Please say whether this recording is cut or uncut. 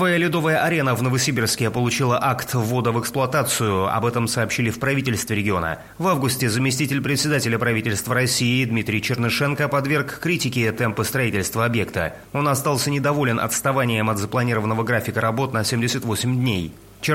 uncut